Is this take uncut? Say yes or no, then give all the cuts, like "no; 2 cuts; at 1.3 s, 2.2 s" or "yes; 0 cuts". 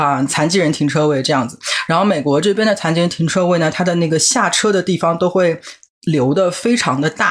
yes; 0 cuts